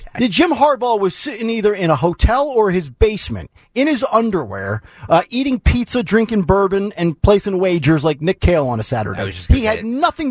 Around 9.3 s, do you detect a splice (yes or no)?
no